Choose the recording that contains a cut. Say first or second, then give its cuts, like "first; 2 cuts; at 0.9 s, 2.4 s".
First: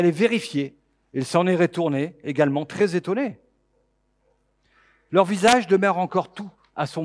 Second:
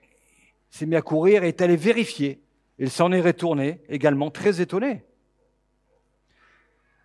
first; 1 cut; at 5.1 s